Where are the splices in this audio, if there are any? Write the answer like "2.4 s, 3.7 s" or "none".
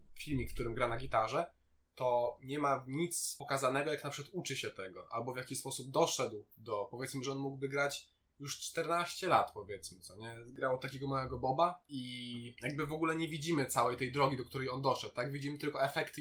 none